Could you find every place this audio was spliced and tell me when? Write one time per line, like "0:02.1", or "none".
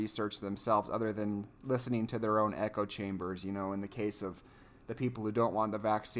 none